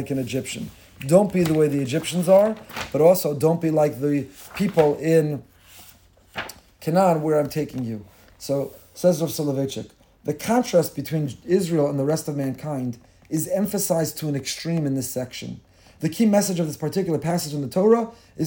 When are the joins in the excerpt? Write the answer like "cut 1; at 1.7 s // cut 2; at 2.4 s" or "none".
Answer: none